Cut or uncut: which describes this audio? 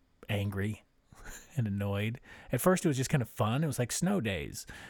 uncut